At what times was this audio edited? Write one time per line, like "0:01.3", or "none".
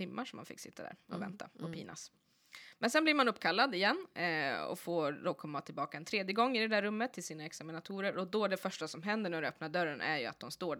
none